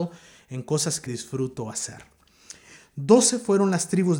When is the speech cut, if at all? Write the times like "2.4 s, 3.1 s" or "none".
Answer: 1.1 s, 2.8 s